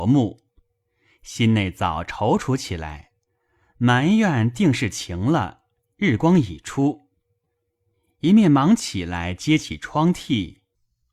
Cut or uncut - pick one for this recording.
uncut